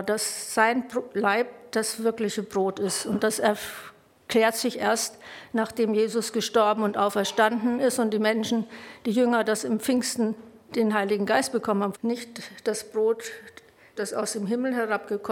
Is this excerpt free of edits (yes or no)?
no